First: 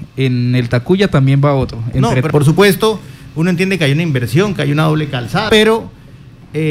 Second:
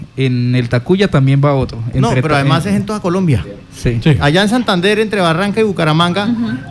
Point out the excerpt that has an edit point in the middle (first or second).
first